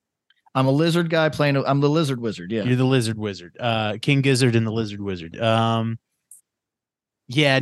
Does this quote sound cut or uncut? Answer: uncut